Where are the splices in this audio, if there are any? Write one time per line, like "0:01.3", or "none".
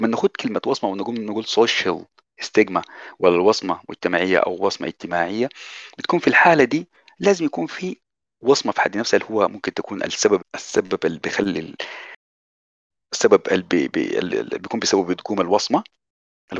0:10.4

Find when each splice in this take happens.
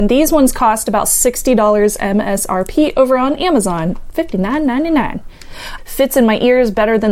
0:05.8

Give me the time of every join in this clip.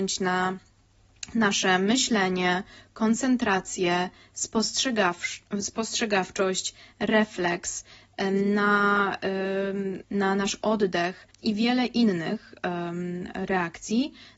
0:10.0
0:11.3

